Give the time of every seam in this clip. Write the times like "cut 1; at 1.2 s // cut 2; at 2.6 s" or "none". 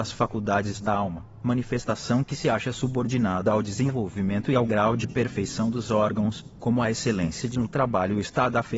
none